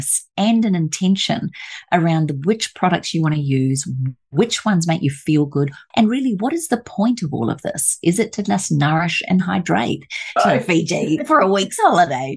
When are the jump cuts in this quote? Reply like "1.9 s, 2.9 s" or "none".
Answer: 5.9 s, 10.4 s